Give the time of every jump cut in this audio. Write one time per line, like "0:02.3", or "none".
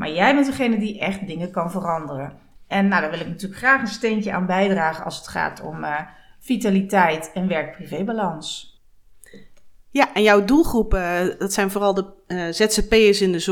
0:02.6